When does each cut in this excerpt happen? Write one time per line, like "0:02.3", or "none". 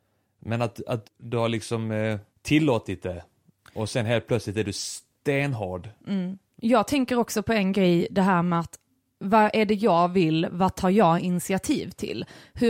0:01.0
0:02.3